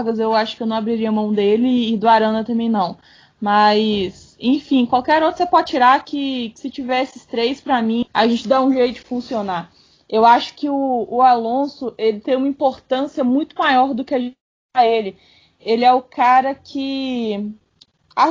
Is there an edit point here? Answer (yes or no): yes